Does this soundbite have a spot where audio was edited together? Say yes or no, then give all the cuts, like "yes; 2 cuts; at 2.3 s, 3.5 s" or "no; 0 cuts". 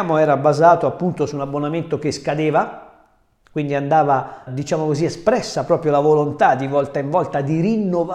yes; 1 cut; at 4.5 s